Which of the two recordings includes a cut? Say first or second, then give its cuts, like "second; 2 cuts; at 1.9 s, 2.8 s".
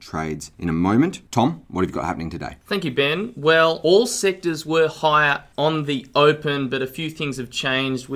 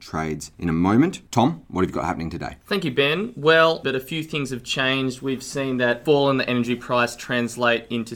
second; 1 cut; at 3.8 s